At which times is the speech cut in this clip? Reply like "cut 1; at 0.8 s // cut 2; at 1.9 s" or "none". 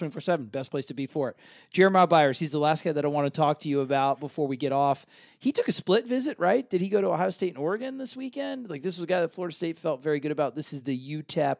none